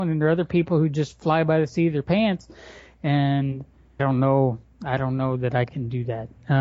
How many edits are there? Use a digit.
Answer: 1